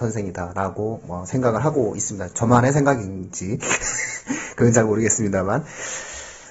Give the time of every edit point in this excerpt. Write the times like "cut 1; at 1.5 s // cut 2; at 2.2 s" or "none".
none